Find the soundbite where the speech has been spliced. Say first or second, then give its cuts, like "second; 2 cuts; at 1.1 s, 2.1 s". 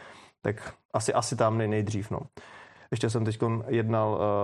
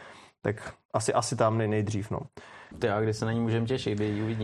second; 1 cut; at 2.7 s